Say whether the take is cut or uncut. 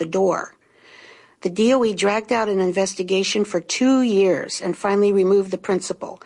uncut